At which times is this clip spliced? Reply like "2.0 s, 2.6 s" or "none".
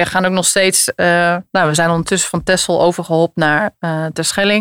none